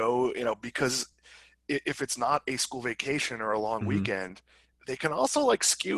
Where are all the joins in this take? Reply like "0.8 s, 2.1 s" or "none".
none